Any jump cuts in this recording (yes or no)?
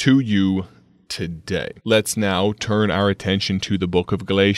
yes